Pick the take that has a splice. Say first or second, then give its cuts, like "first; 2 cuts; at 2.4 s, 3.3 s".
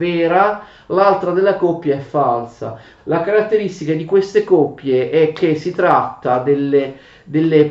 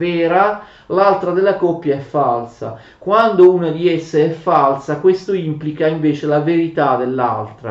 first; 1 cut; at 3.0 s